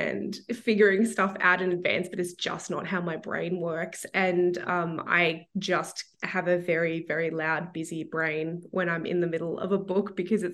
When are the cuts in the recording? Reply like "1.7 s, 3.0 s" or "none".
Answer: none